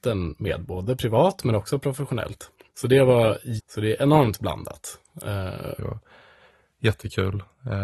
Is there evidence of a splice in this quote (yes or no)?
yes